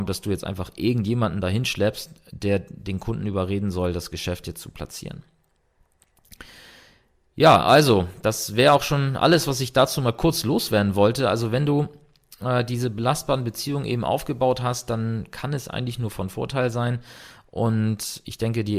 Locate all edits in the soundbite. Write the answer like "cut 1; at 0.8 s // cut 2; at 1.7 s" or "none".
none